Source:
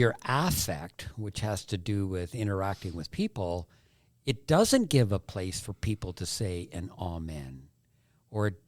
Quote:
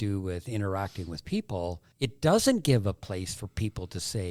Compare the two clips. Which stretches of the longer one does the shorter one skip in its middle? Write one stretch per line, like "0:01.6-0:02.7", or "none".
0:03.8-0:04.2